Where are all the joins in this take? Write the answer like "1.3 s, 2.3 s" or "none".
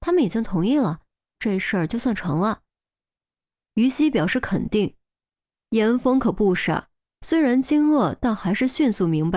1.4 s

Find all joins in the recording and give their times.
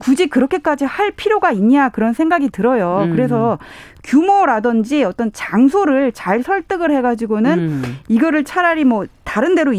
none

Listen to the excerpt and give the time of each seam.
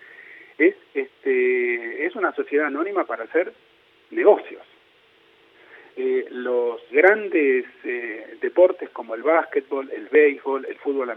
6.9 s

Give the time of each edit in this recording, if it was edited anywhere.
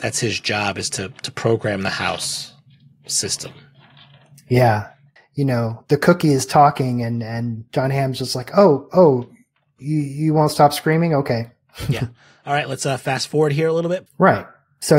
5.2 s, 14.1 s

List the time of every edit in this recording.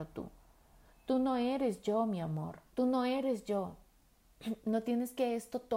2.7 s

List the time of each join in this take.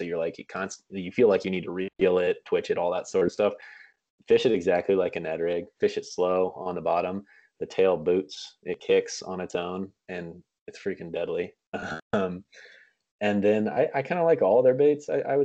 none

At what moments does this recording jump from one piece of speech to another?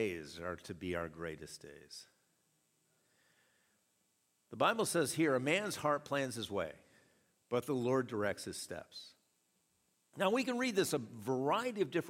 none

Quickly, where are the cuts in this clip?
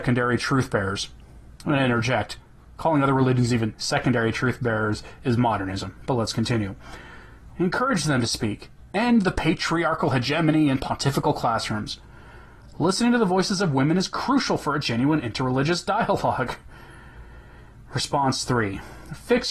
7.5 s

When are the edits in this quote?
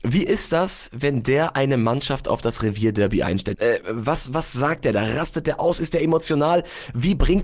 3.5 s

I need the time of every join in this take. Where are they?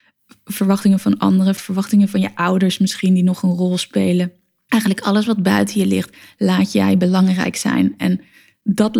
1.6 s

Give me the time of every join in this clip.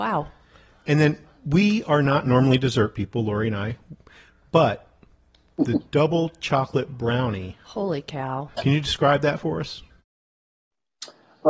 8.5 s

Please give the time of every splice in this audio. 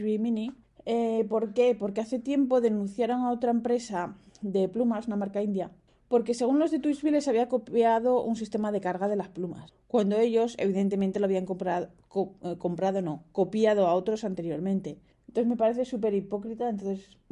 none

